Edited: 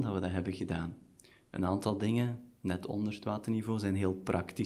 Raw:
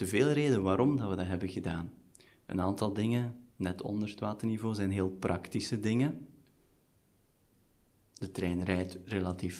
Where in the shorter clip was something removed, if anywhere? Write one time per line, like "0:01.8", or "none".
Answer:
none